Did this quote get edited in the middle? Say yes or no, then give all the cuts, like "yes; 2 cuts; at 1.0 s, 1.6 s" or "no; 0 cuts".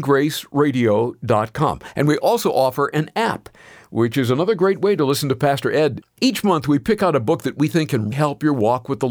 yes; 2 cuts; at 6.0 s, 8.1 s